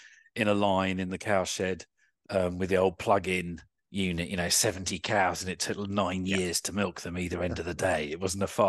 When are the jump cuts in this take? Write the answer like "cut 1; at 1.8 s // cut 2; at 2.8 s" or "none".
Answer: none